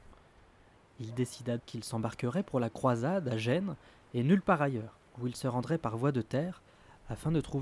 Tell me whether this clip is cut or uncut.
cut